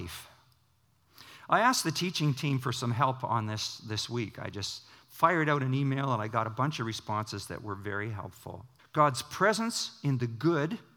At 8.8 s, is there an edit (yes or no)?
yes